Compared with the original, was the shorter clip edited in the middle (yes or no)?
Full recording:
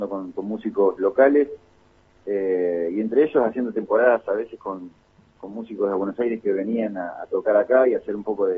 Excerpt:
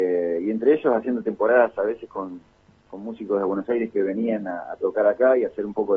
no